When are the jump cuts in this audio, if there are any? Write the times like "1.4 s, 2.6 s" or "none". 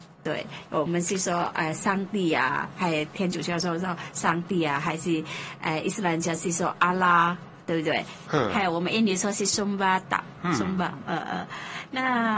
8.3 s